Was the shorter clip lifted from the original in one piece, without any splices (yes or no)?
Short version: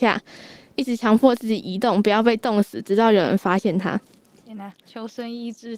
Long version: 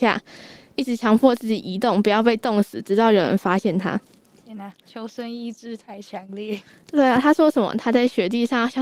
yes